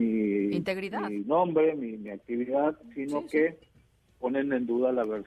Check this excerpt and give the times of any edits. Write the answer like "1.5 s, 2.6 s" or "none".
none